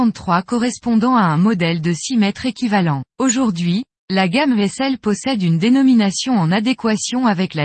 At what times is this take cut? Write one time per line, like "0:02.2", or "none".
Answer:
0:03.1